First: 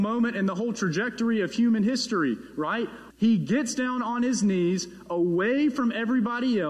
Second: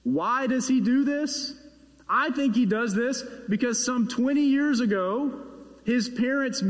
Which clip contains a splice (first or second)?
first